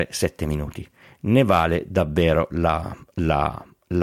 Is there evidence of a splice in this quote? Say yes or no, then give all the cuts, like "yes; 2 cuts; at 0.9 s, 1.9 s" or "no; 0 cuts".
no; 0 cuts